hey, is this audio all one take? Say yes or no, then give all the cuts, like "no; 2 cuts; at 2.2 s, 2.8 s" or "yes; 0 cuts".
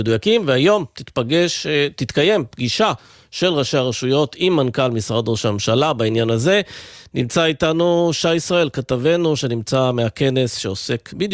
yes; 0 cuts